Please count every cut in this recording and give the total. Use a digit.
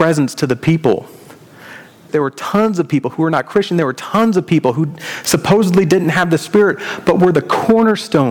1